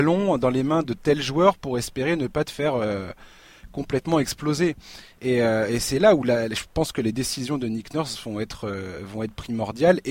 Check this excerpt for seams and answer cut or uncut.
uncut